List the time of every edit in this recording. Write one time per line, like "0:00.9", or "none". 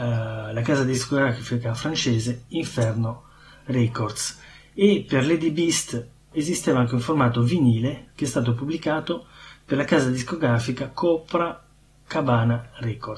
0:06.3